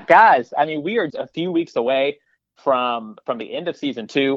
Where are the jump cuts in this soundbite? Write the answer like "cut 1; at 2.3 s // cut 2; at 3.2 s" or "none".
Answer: cut 1; at 1.1 s